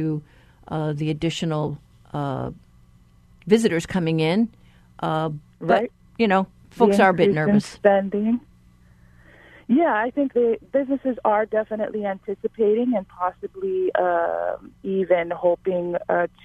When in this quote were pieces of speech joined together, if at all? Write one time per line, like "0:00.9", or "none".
0:10.3